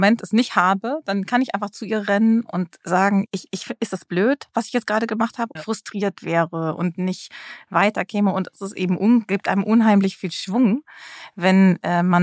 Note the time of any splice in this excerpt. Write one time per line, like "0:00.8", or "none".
0:03.3
0:05.6